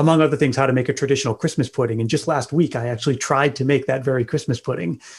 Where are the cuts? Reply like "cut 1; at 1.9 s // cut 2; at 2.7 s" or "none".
none

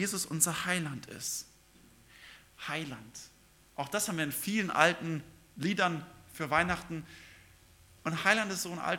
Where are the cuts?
none

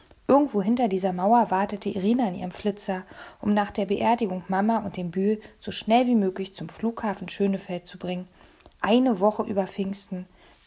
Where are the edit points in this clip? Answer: none

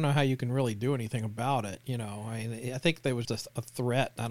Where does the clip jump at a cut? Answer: cut 1; at 3.2 s

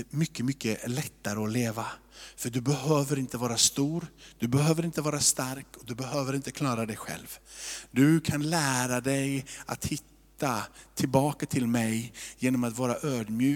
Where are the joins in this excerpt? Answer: none

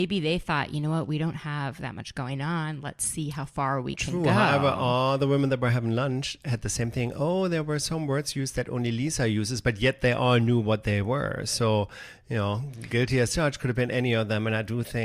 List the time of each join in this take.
none

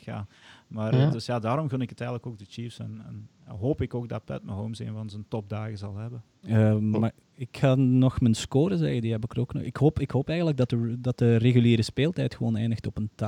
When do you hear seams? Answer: none

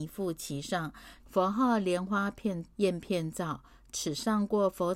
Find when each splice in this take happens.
cut 1; at 1.2 s // cut 2; at 2.7 s

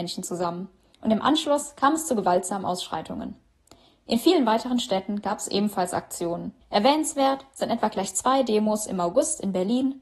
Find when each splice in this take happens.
cut 1; at 6.6 s

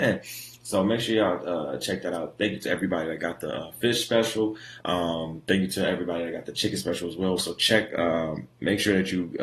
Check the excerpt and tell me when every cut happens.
cut 1; at 4.8 s // cut 2; at 7.4 s

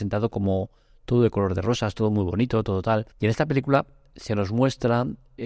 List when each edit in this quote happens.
cut 1; at 3.1 s

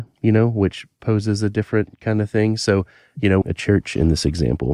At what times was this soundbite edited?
cut 1; at 3.4 s

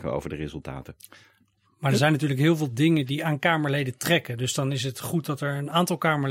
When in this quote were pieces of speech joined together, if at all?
none

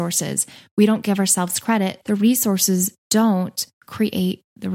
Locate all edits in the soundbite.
cut 1; at 2.0 s

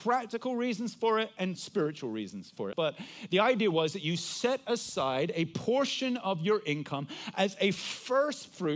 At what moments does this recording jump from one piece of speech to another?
cut 1; at 2.7 s

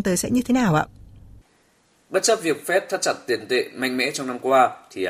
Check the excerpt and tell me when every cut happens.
cut 1; at 1.9 s

